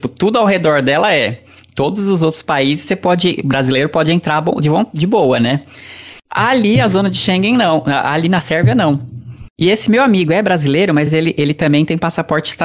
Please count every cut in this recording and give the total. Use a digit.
0